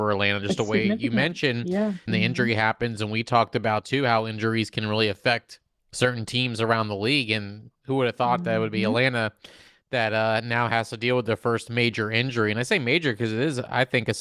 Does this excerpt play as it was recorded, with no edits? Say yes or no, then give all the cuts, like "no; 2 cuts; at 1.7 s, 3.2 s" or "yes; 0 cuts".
no; 1 cut; at 2.1 s